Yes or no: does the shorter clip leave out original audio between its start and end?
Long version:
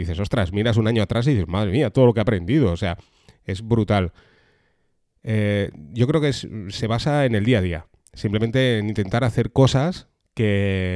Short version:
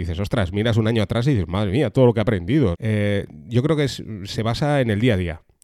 yes